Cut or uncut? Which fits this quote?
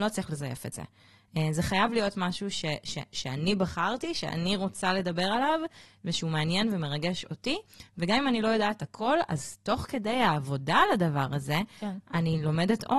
uncut